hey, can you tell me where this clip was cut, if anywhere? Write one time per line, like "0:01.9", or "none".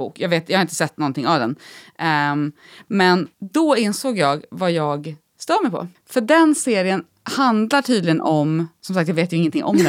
0:03.3